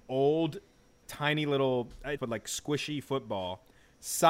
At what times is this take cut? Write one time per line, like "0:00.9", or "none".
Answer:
0:01.0
0:02.2